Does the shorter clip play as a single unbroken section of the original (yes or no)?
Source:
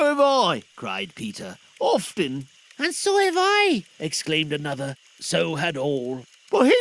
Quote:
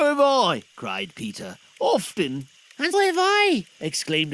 no